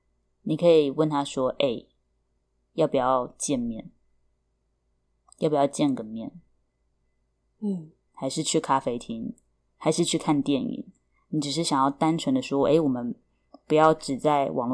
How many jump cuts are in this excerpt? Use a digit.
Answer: 1